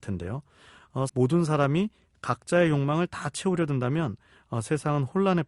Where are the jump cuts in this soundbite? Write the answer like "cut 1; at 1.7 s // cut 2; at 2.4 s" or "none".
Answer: cut 1; at 1.1 s